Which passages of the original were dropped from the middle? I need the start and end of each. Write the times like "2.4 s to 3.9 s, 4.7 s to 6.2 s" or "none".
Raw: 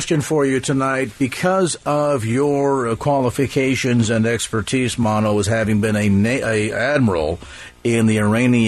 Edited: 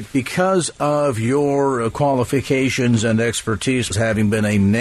5.0 s to 5.4 s